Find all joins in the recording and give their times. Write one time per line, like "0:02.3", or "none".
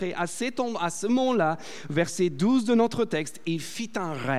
none